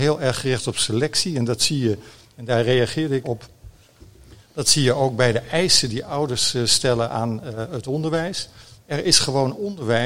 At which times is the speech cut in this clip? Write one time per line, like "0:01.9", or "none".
0:03.2
0:08.8